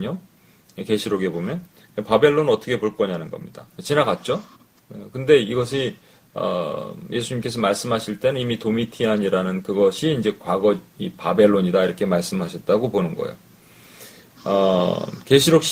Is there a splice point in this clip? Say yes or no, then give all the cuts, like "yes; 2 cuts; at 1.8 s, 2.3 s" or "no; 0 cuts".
yes; 1 cut; at 3.7 s